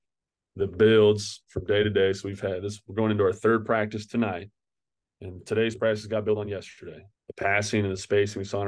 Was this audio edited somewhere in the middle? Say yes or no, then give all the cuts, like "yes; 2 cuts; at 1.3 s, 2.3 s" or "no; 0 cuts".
yes; 1 cut; at 7.2 s